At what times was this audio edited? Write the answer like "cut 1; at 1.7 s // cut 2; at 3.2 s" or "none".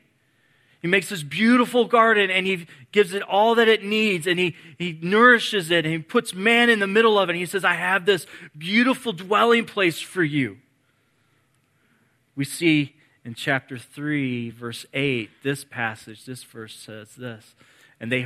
none